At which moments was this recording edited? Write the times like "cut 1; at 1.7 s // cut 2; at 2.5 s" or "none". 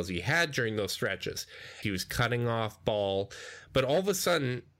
cut 1; at 1.8 s